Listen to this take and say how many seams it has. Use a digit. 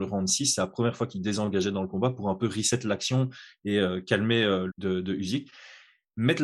1